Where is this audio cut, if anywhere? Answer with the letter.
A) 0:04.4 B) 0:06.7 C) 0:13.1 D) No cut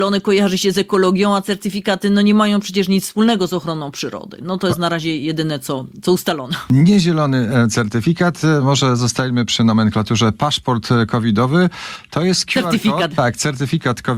C